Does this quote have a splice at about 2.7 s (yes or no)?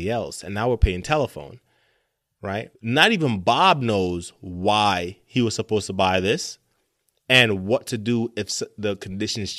yes